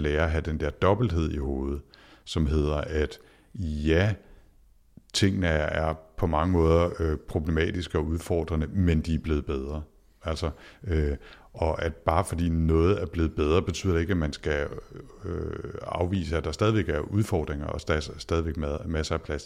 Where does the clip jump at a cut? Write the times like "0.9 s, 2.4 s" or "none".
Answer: none